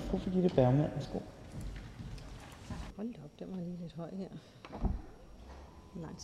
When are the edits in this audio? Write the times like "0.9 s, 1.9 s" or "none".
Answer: 2.9 s